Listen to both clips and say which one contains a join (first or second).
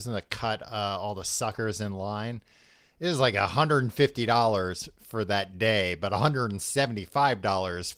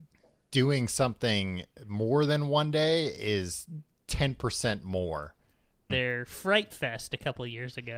second